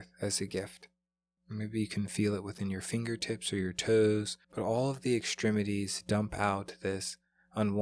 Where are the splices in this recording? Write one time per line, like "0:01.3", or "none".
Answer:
0:01.4
0:04.4